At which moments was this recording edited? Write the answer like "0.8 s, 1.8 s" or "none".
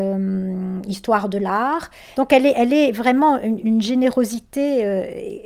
2.1 s, 3.6 s